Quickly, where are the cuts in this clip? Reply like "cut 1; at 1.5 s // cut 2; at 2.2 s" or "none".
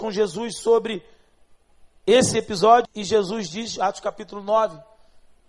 cut 1; at 2.9 s